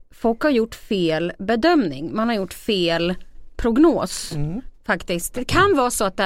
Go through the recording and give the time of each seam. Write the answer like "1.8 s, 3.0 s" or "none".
4.7 s